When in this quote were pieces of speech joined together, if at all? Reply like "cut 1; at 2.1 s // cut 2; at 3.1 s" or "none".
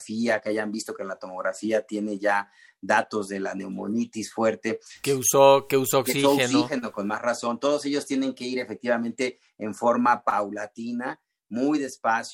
cut 1; at 5.0 s